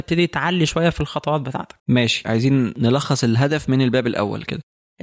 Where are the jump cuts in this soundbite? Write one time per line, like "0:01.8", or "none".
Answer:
0:01.8